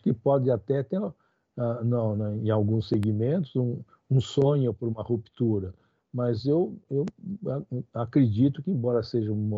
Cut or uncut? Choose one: uncut